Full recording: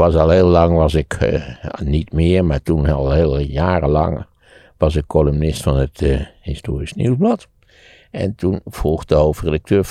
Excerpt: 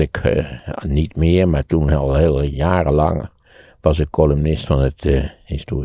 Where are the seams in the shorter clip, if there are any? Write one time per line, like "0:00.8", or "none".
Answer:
none